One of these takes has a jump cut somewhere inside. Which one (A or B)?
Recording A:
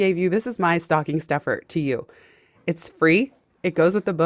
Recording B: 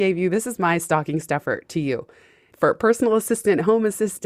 B